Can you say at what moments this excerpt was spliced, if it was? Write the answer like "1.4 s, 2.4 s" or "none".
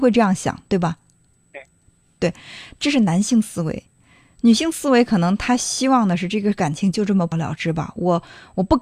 7.3 s